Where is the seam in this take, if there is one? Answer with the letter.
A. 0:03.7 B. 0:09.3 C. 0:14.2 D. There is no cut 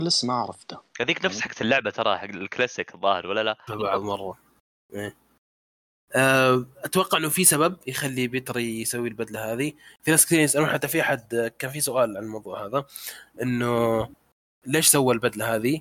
A